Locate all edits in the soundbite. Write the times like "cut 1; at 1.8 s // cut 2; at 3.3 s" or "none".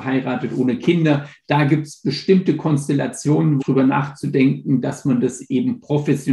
cut 1; at 3.6 s